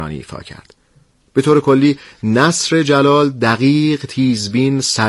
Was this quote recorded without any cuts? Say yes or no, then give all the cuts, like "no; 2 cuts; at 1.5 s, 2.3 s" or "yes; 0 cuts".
no; 1 cut; at 1.3 s